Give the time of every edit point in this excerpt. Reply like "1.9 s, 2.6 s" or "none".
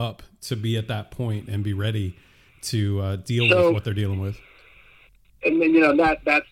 none

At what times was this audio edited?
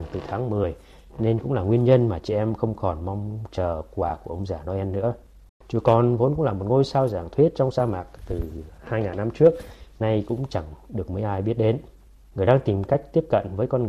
5.5 s

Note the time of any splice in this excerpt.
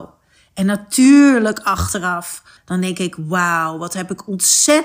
2.6 s

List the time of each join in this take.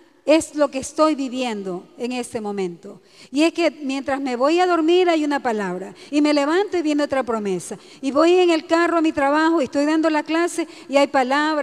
6.1 s

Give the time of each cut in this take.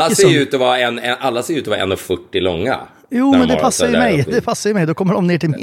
none

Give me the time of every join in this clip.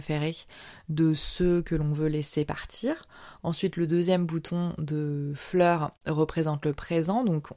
none

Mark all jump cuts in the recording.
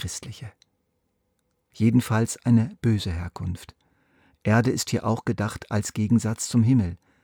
1.7 s

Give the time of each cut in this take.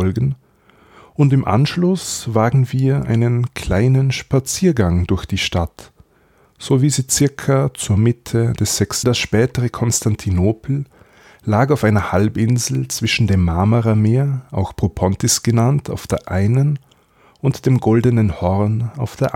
9.0 s

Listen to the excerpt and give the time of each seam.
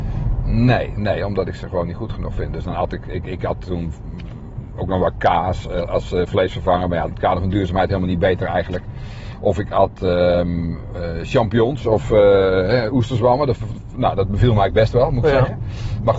7.1 s

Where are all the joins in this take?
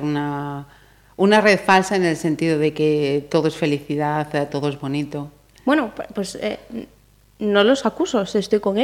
4.5 s

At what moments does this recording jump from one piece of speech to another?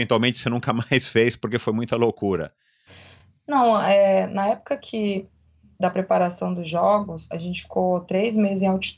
none

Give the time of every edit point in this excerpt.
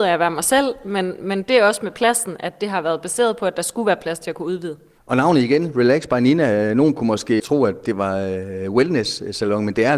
none

